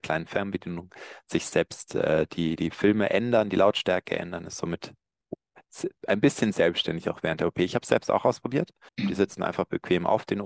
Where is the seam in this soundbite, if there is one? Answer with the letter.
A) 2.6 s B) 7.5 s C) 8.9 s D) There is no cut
C